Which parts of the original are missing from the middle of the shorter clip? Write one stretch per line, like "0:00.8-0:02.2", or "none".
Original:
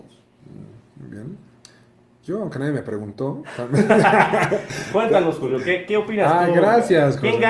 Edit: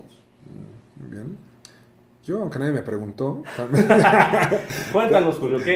none

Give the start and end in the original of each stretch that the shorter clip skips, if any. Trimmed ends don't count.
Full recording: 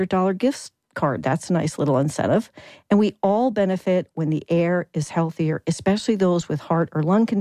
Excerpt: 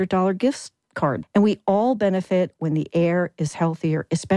0:01.2-0:02.8

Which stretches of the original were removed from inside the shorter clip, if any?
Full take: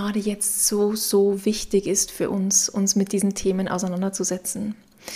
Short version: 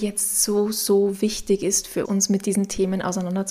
0:02.3-0:02.7

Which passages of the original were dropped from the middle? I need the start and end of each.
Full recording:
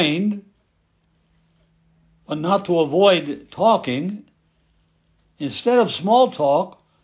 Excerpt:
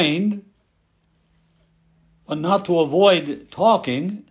none

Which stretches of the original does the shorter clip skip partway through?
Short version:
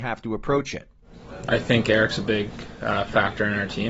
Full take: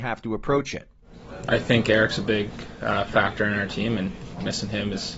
none

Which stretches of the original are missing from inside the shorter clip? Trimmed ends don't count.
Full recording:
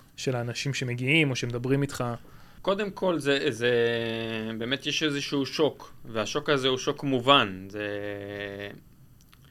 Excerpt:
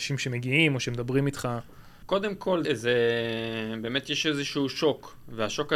0:03.2-0:03.4

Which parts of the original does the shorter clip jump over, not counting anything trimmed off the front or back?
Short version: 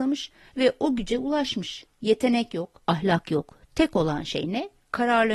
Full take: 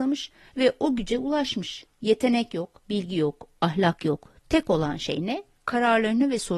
0:02.8-0:03.5

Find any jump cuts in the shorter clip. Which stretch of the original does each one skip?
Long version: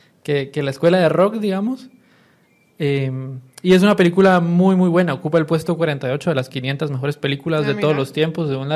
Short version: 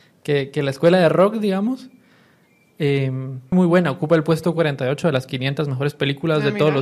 0:03.5-0:04.7

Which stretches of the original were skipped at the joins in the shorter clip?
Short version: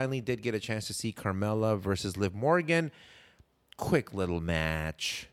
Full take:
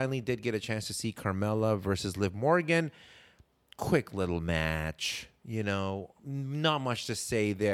none

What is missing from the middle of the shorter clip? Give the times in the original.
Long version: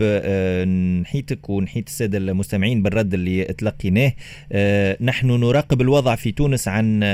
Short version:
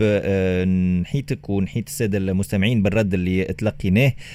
none

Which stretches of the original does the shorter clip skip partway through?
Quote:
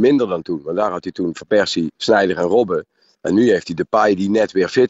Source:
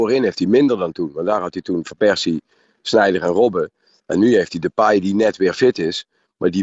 0:02.4-0:02.8

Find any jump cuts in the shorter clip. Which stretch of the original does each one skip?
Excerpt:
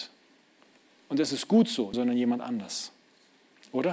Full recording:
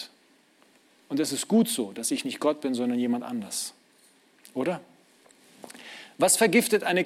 0:01.9-0:02.8

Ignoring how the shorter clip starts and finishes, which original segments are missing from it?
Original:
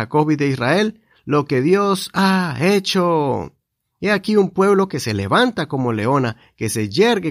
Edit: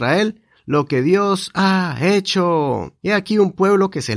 0:03.6-0:04.0

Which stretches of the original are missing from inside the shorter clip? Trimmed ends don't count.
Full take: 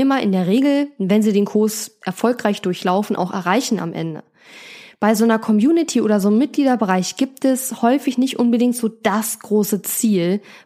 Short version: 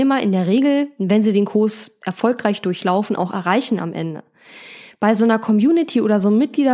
none

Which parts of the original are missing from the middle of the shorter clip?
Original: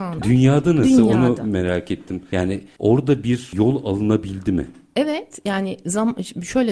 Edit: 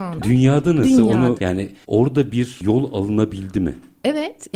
0:01.4-0:02.3

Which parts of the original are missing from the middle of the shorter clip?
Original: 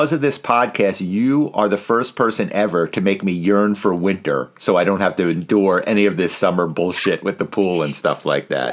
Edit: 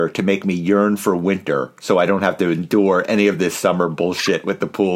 none

